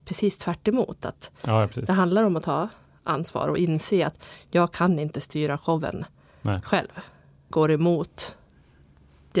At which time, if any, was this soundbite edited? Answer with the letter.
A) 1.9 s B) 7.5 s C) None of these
B